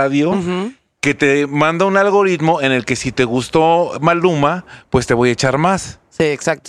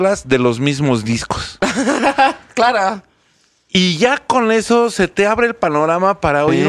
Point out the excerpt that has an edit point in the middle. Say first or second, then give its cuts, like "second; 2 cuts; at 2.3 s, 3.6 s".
first; 1 cut; at 1.0 s